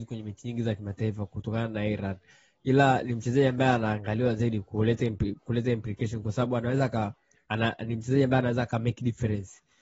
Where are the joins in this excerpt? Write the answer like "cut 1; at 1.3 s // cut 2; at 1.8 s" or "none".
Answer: none